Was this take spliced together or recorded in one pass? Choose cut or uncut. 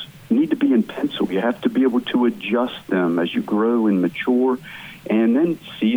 uncut